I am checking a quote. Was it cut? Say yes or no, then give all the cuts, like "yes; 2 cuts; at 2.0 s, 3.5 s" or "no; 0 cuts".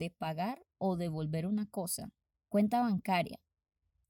yes; 1 cut; at 2.3 s